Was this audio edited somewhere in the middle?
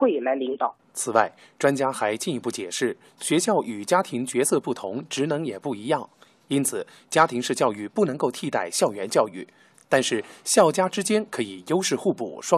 no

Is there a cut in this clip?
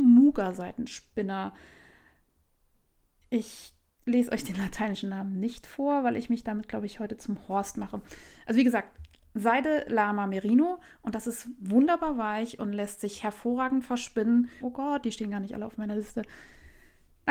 yes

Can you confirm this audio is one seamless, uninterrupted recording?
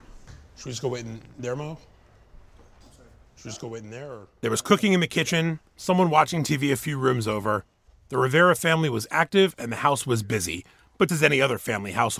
no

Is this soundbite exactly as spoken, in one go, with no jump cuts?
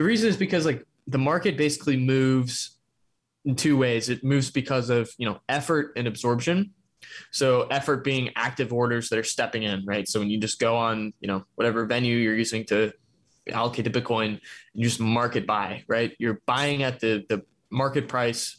yes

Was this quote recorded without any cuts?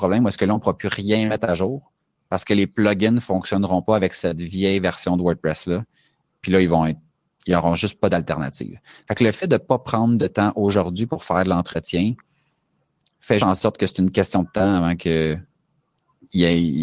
no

